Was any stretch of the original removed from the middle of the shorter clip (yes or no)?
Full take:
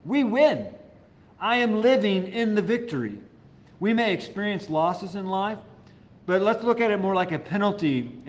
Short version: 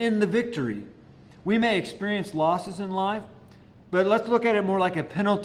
no